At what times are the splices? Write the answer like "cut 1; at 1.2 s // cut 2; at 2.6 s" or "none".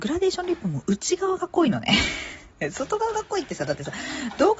none